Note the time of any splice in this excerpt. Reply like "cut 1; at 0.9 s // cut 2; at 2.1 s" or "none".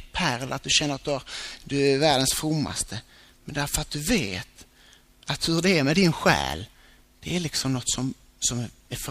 none

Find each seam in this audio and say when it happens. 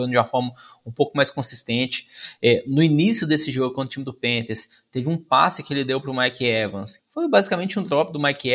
cut 1; at 7.0 s

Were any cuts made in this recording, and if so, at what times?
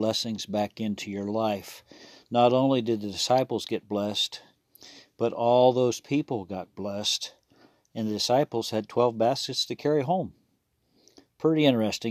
none

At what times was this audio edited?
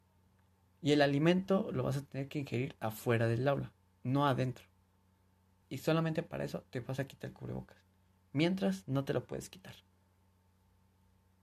cut 1; at 5.6 s

